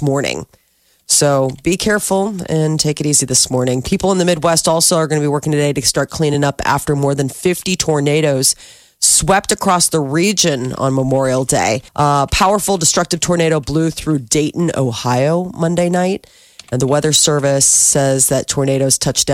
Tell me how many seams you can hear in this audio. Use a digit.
1